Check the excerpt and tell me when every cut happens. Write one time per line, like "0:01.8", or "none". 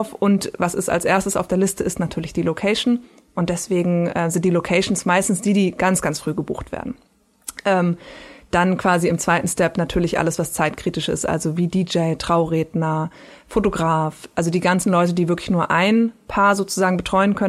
none